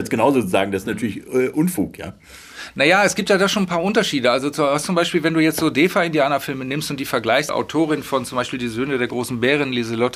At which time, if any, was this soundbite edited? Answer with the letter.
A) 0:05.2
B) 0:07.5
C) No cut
B